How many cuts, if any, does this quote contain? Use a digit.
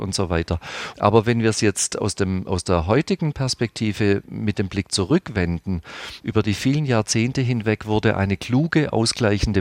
2